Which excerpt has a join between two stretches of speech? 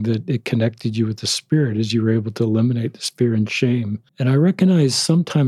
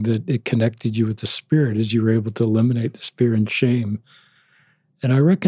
first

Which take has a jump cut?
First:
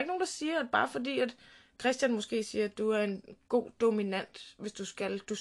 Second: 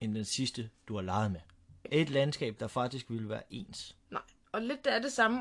second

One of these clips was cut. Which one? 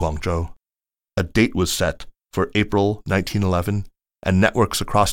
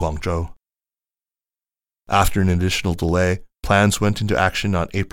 first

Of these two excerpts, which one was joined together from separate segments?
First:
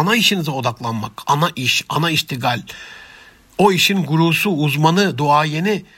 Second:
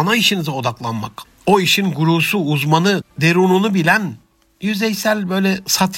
second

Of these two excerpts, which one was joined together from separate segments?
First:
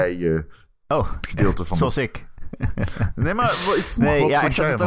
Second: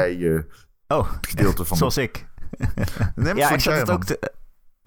second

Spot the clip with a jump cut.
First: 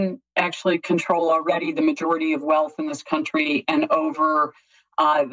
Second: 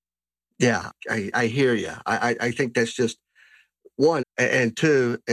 second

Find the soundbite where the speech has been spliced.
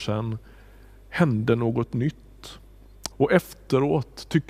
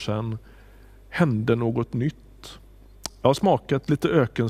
first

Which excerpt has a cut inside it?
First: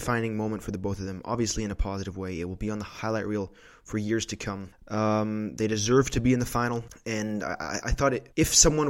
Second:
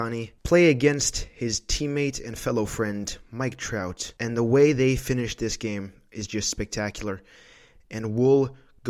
first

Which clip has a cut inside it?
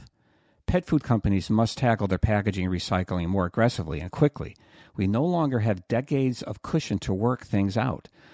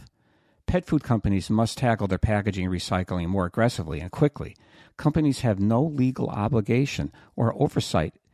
second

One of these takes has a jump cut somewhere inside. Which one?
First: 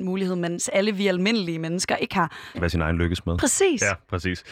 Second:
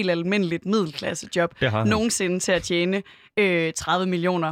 first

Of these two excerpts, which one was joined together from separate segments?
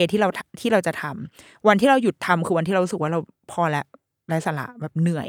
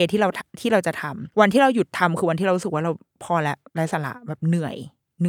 second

